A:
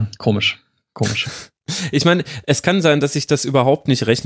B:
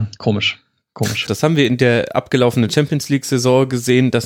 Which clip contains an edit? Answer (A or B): B